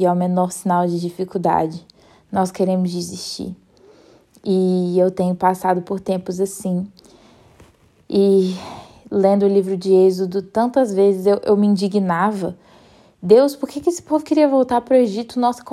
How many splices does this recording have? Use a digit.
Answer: 0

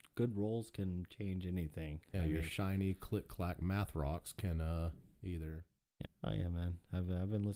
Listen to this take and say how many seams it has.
1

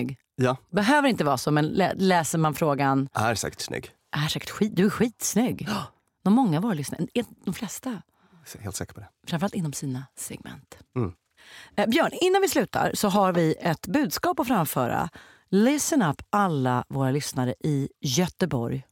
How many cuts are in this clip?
0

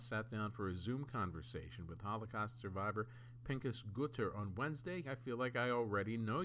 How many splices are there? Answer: 1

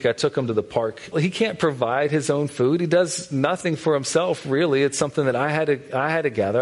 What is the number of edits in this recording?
1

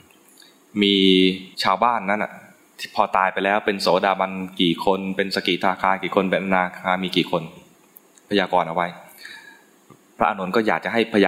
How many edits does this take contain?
1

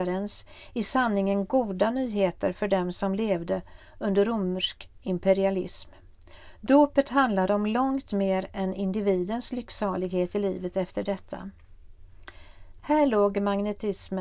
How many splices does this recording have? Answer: 1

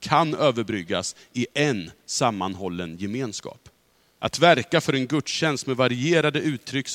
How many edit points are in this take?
1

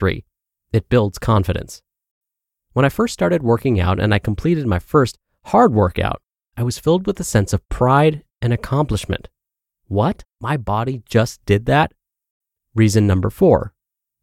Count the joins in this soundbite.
1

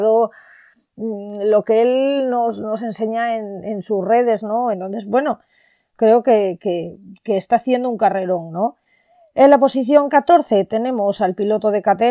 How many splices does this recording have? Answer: 1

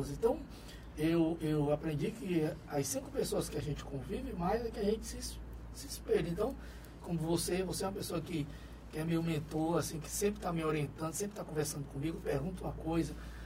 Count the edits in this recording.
1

